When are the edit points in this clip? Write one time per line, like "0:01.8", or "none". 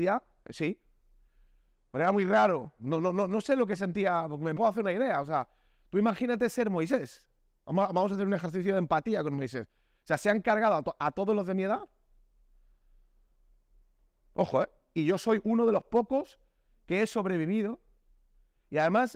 0:04.6